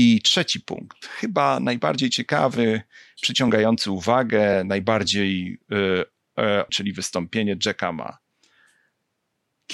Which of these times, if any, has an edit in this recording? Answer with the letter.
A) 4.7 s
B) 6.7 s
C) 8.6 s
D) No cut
B